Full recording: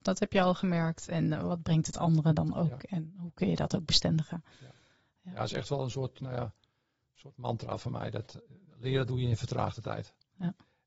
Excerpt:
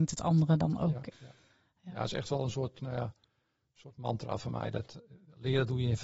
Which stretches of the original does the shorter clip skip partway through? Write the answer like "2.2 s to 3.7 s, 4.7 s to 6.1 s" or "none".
2.9 s to 4.5 s